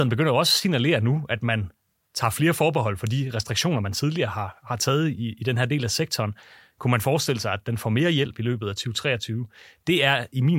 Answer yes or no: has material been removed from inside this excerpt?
no